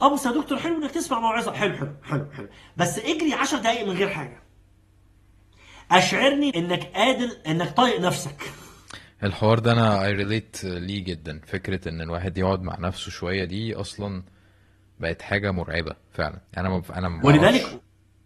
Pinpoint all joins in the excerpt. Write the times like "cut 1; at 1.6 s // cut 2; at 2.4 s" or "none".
cut 1; at 6.5 s // cut 2; at 16.5 s